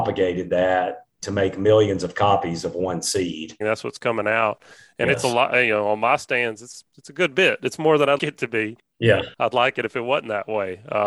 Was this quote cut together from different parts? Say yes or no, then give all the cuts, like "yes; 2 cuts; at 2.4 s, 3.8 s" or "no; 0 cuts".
yes; 2 cuts; at 3.6 s, 8.2 s